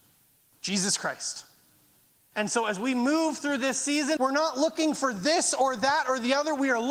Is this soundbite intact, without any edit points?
no; 2 cuts; at 2.3 s, 4.2 s

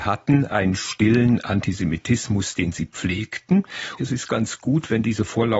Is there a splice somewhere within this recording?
yes; 1 cut; at 4.0 s

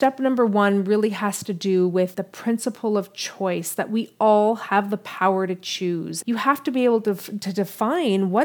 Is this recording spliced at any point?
yes; 2 cuts; at 2.1 s, 6.2 s

